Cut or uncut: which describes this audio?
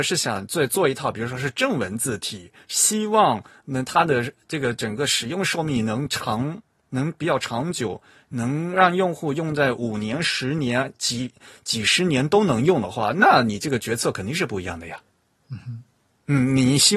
uncut